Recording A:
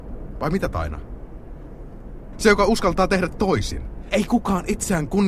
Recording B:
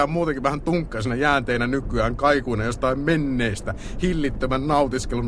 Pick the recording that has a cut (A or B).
A